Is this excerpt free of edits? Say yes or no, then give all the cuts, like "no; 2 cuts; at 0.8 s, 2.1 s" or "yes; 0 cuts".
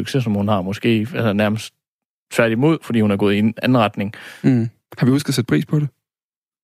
yes; 0 cuts